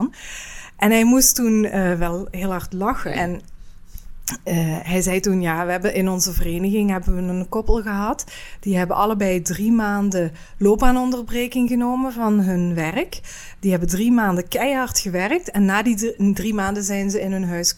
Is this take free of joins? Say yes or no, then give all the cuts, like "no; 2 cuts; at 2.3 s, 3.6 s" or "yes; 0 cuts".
yes; 0 cuts